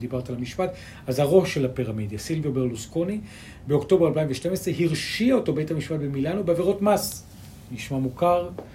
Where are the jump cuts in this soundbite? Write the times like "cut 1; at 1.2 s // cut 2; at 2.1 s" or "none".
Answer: none